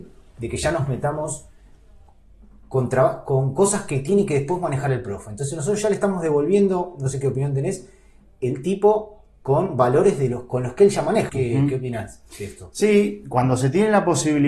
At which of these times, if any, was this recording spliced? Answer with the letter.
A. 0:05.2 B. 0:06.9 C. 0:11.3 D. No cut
C